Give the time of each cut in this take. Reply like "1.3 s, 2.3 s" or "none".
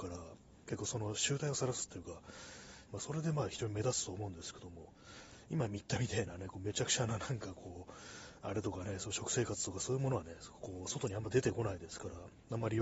2.9 s